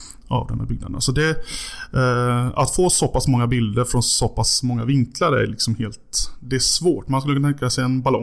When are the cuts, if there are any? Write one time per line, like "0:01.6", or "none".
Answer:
none